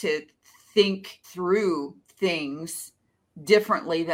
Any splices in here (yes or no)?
yes